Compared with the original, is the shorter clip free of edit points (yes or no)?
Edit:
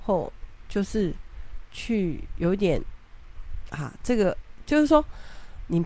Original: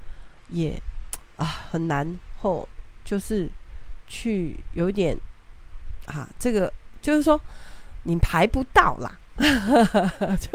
yes